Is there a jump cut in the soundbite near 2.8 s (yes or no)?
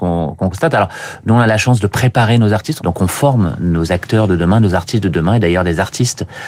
yes